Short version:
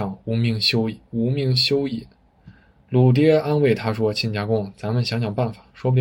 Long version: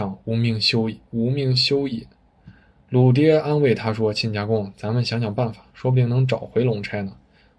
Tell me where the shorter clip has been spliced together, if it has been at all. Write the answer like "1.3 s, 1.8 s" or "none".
none